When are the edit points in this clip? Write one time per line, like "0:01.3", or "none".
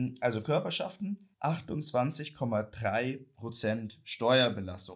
0:01.3